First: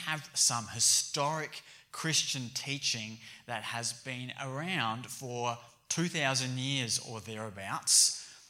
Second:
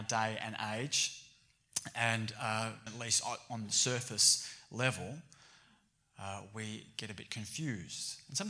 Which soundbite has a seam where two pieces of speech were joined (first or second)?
second